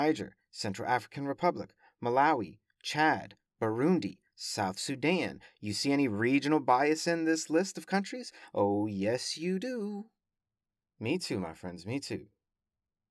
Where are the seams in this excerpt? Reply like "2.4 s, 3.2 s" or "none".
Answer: none

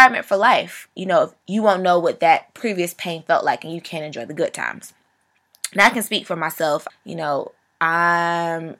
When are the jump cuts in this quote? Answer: 1.4 s, 6.9 s

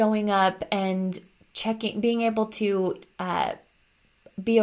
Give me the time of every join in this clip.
none

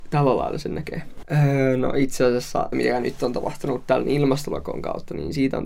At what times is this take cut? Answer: 1.2 s, 2.7 s

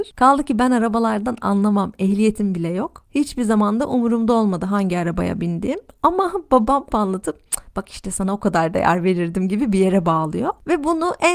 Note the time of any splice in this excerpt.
6.9 s

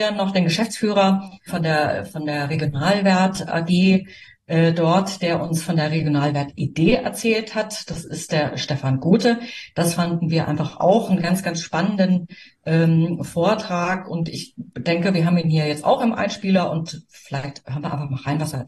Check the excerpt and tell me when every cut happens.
1.5 s

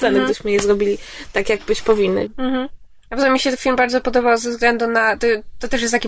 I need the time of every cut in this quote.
2.3 s

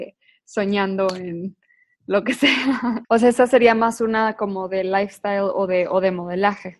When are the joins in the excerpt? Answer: 3.0 s

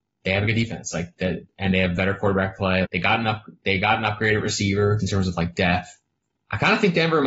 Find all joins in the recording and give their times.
2.8 s, 5.0 s

